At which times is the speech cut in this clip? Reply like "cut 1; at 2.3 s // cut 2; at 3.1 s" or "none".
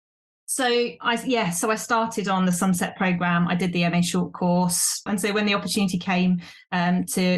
cut 1; at 5.1 s